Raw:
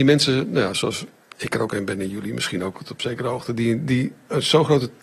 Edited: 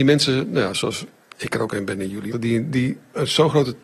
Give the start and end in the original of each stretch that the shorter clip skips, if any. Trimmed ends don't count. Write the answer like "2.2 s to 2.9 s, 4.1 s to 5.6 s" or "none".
2.3 s to 3.5 s